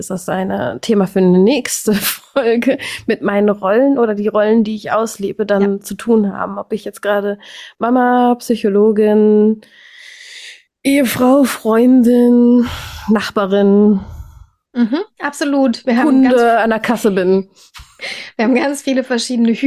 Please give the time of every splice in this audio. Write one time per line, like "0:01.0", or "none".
none